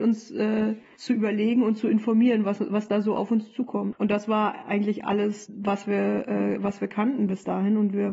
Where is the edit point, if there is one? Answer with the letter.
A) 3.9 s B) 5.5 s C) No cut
A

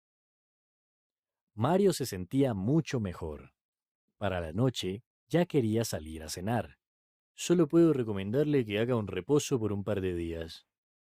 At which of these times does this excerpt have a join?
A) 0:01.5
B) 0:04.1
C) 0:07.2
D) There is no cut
C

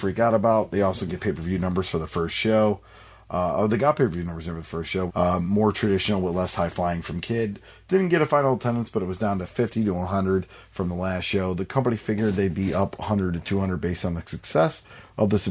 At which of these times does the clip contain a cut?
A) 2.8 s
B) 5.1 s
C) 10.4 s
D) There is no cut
B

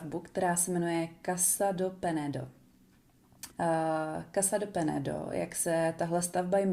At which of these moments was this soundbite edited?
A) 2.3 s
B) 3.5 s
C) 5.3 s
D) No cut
B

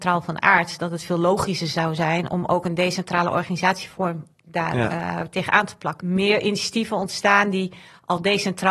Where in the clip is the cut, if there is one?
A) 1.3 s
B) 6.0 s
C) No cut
B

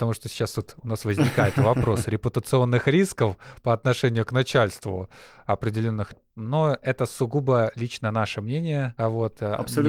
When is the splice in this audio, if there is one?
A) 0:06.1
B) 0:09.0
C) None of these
A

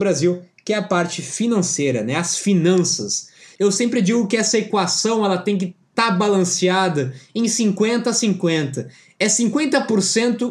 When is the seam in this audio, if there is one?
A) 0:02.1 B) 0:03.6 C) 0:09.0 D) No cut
B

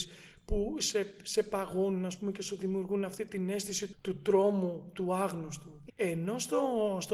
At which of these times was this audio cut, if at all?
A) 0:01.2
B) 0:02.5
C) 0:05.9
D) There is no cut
C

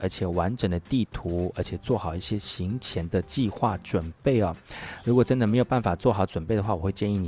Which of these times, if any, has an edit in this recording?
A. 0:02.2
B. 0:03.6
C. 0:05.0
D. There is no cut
D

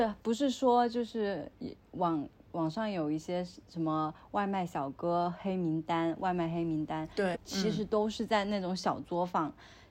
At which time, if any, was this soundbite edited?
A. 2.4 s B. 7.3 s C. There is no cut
B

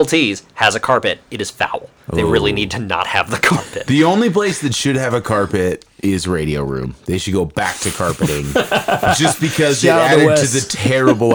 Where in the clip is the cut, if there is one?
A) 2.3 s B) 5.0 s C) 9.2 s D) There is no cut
D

